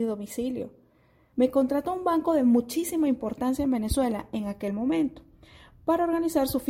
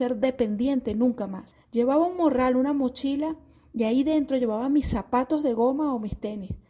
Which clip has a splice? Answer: first; 1 cut; at 1.3 s

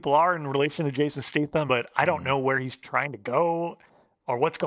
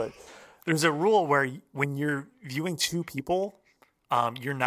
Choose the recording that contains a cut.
first; 2 cuts; at 1.7 s, 2.8 s

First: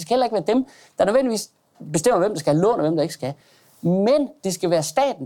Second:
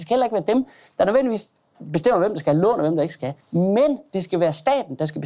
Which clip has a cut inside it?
second; 1 cut; at 3.4 s

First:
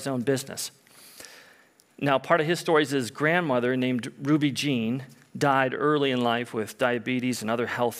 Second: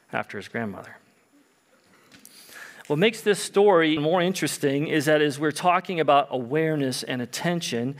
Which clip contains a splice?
second; 1 cut; at 4.0 s

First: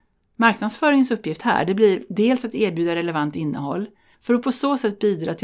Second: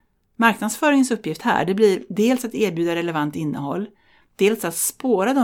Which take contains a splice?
first; 1 cut; at 4.1 s

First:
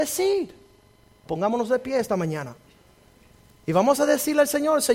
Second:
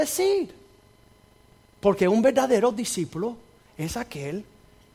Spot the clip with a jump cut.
first; 1 cut; at 1.3 s

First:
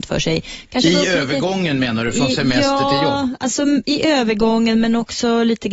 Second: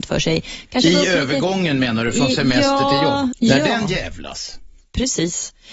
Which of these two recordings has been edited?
second; 1 cut; at 3.3 s

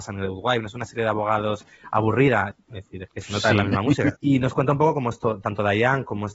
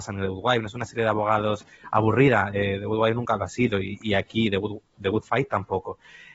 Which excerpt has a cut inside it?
first; 2 cuts; at 2.5 s, 4.1 s

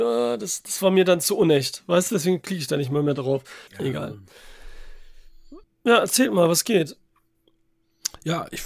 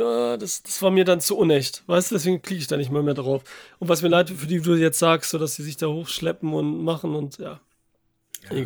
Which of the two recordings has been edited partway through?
first; 2 cuts; at 3.7 s, 5.6 s

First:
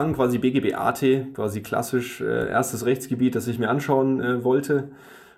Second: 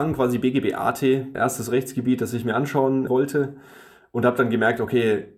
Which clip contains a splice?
second; 2 cuts; at 1.4 s, 3.1 s

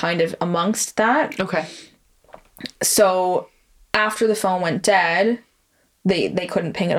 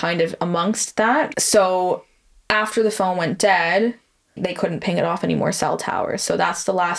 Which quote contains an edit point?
second; 2 cuts; at 1.3 s, 4.4 s

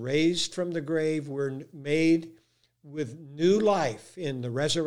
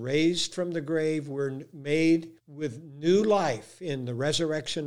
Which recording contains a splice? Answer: second; 1 cut; at 2.4 s

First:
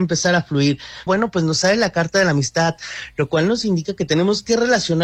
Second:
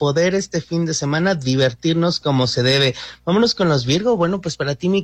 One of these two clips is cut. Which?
first; 1 cut; at 1.1 s

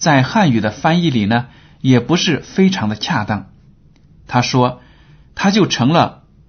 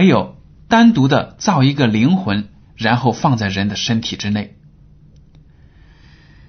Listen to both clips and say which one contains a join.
first; 1 cut; at 4.2 s

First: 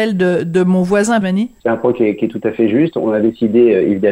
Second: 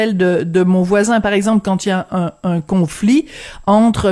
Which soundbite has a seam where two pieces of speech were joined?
first; 1 cut; at 1.2 s

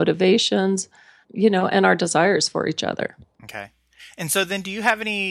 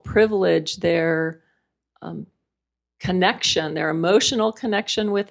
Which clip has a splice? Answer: first; 1 cut; at 1.2 s

